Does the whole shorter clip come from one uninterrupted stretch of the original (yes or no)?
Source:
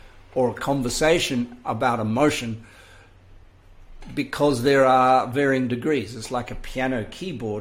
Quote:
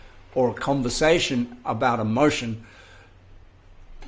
yes